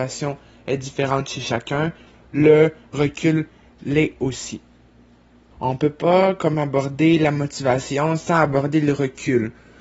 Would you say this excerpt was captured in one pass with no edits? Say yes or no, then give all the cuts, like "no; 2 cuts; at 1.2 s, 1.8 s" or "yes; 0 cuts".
no; 1 cut; at 5.5 s